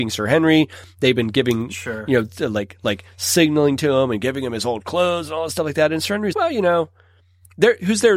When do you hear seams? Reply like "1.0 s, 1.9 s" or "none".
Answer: 6.3 s